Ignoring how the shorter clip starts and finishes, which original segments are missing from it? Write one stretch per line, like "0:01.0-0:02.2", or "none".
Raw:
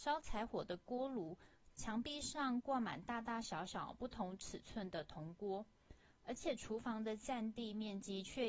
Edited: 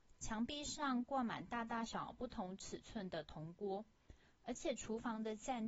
0:03.4-0:03.7

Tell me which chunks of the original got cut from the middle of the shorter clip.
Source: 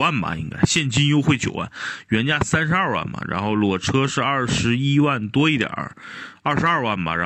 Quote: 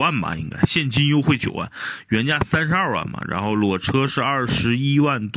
none

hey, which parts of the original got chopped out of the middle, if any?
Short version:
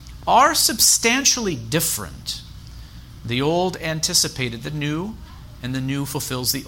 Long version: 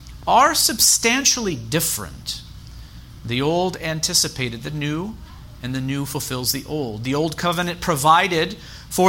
none

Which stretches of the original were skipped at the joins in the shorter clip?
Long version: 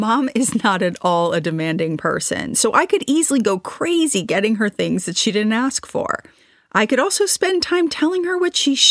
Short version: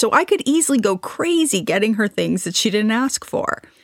none

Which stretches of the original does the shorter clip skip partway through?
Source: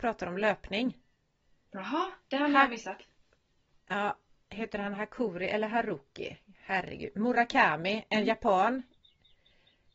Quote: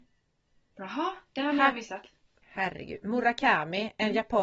0:03.4-0:06.5

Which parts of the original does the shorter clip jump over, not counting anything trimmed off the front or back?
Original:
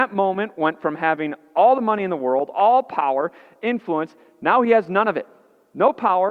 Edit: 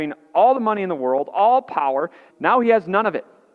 0:03.5-0:04.3

